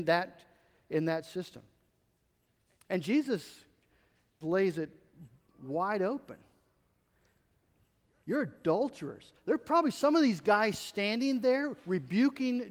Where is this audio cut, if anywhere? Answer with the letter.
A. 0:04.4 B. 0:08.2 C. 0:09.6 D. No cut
A